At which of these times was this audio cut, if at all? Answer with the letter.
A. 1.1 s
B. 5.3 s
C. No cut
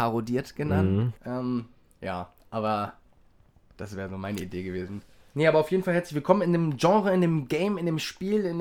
A